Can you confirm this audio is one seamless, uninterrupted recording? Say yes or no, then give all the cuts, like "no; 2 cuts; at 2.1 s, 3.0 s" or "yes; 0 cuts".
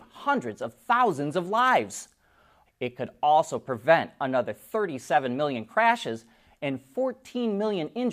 no; 1 cut; at 2.7 s